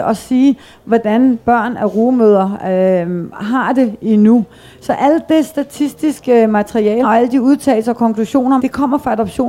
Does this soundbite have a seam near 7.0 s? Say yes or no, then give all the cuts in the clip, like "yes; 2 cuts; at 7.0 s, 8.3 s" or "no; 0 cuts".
yes; 2 cuts; at 7.0 s, 8.6 s